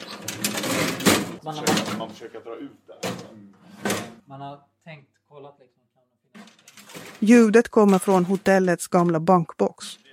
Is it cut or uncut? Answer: cut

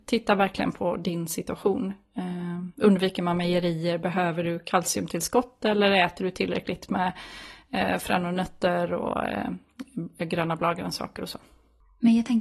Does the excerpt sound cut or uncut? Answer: uncut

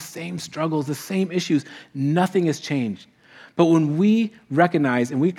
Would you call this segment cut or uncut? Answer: uncut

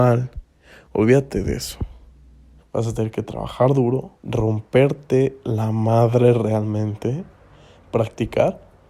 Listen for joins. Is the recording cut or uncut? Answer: cut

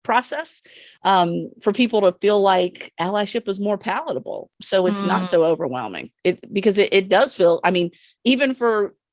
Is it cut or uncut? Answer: uncut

